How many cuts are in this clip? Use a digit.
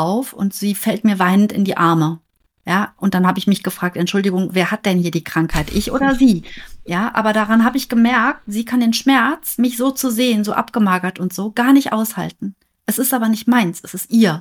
0